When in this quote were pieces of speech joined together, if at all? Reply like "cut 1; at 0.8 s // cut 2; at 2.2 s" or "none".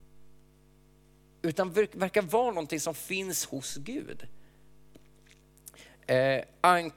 none